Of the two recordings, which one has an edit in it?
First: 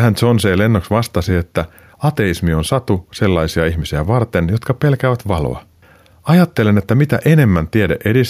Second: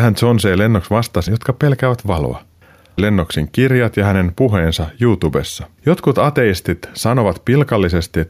second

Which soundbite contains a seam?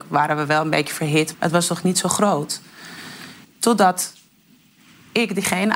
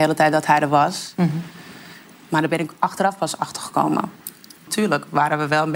first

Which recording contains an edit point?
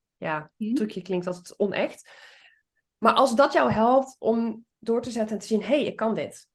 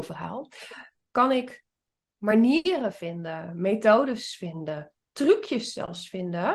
second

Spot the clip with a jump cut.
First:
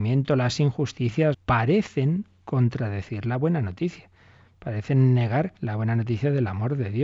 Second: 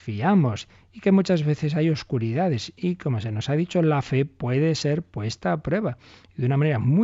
first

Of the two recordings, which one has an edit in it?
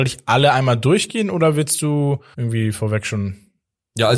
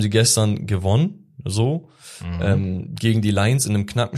first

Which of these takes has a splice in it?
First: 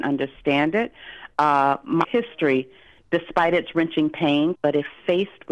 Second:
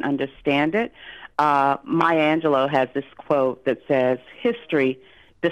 first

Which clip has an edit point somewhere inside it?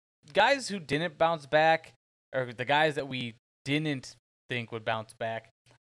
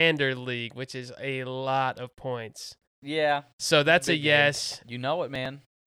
second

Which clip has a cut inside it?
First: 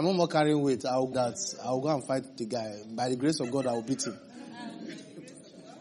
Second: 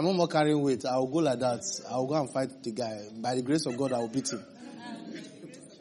first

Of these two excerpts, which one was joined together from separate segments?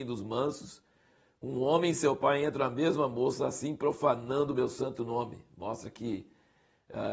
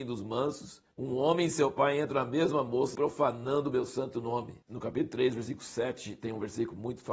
second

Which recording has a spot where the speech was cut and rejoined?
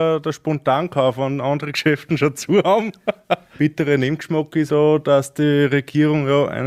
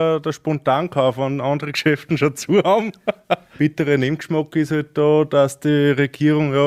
first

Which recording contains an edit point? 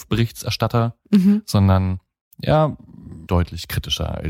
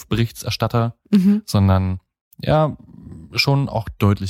first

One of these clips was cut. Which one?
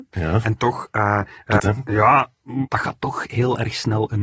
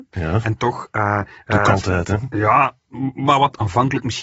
first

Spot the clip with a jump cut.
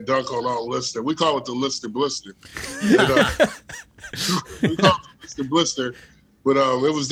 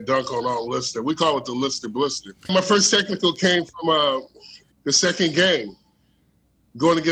second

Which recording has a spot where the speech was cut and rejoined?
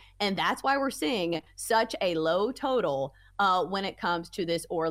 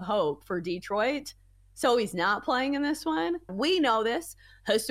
second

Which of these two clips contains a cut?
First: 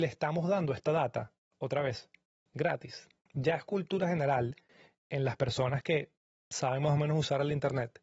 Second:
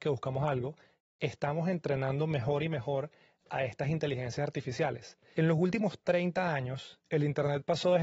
second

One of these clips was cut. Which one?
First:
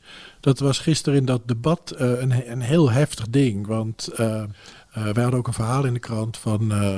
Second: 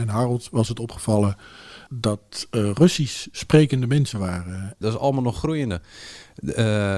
second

